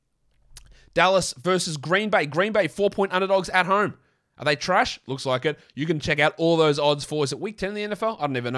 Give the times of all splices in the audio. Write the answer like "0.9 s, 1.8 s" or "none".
none